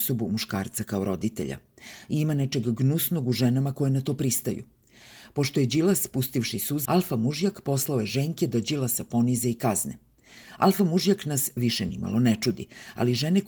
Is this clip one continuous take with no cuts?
no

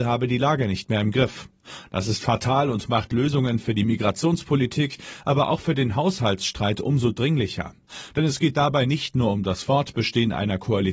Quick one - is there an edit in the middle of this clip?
no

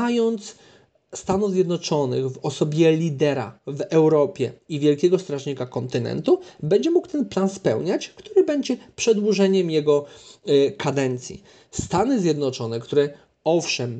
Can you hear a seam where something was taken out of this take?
no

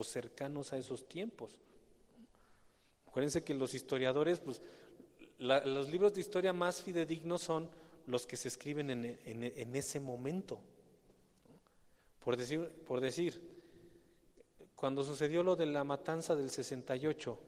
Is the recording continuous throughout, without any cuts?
yes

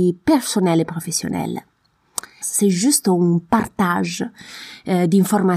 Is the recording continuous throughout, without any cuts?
no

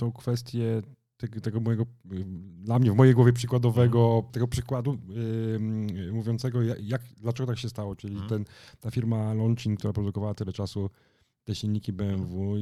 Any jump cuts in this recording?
yes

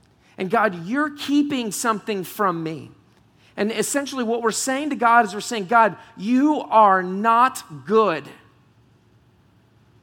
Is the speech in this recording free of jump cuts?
yes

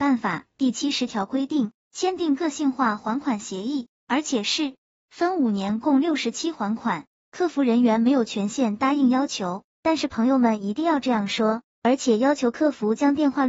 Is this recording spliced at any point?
no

